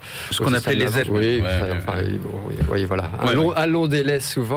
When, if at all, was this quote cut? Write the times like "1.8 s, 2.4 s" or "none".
1.0 s

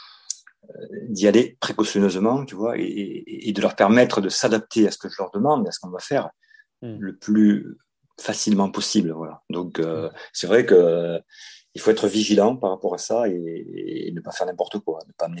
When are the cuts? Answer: none

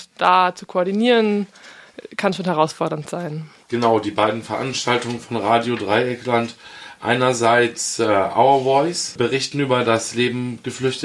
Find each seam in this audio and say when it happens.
none

